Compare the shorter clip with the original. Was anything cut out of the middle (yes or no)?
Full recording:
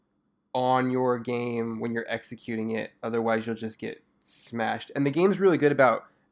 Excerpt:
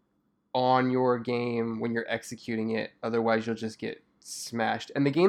no